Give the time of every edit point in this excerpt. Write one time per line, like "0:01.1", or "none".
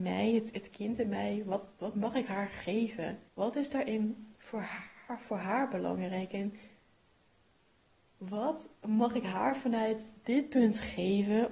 0:03.3

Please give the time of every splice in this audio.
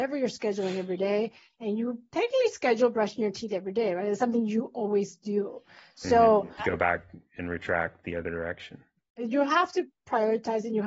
0:06.6

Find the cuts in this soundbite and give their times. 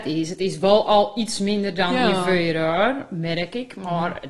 none

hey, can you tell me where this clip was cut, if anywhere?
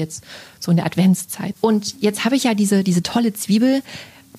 0:01.5

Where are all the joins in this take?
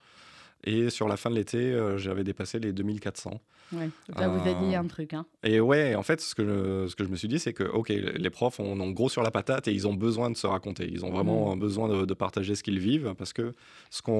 none

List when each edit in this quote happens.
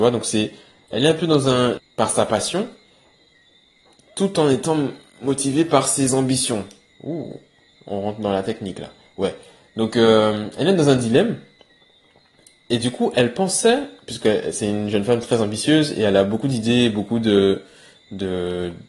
0:01.8

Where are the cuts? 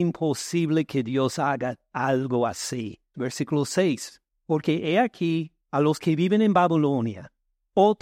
0:03.1
0:05.6

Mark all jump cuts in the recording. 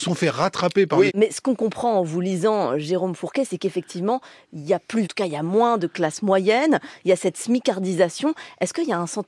0:01.1
0:05.0

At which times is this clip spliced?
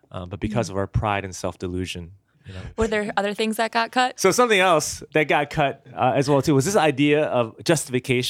0:04.2

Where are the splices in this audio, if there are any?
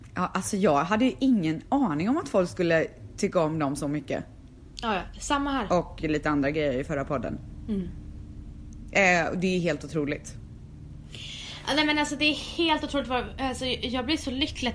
0:04.7

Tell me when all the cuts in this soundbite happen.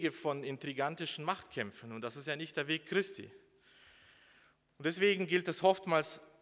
none

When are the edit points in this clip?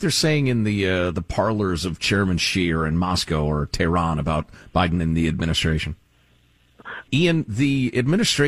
0:07.1

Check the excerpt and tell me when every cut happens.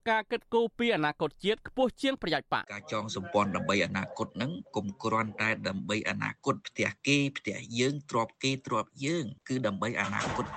0:02.6

